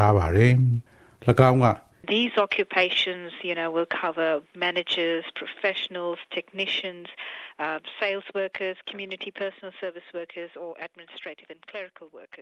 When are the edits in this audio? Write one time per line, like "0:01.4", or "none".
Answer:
none